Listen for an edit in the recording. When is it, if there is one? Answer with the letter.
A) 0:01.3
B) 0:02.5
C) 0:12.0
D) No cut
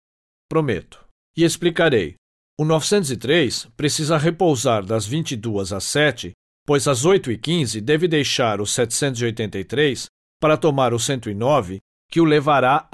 A